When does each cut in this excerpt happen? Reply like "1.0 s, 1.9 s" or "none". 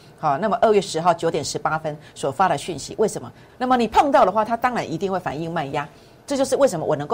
3.5 s